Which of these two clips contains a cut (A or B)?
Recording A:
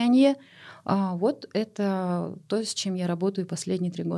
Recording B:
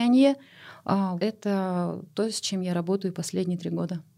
B